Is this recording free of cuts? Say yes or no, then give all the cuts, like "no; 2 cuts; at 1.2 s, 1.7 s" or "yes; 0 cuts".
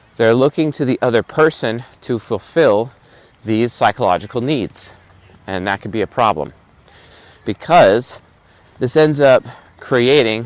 yes; 0 cuts